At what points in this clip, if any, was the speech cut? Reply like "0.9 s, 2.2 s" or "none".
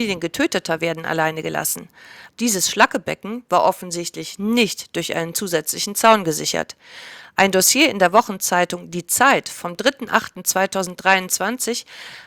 2.3 s